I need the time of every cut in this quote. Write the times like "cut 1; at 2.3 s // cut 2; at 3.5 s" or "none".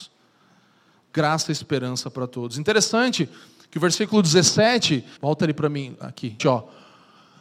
cut 1; at 5.2 s // cut 2; at 6.4 s